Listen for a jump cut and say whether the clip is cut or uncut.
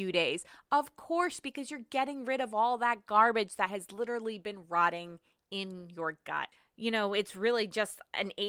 cut